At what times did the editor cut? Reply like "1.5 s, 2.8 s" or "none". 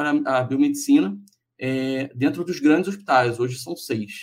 none